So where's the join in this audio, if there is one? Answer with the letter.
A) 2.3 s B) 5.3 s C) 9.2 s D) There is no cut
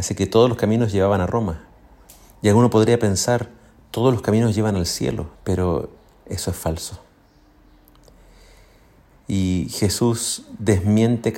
B